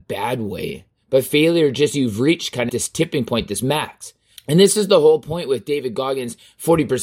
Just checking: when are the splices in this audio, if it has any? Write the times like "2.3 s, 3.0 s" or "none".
2.7 s, 4.4 s